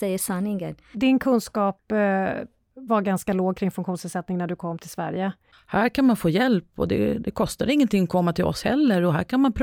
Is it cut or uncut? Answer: cut